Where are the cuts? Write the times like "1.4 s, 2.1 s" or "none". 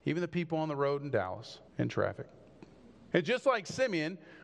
1.7 s, 3.1 s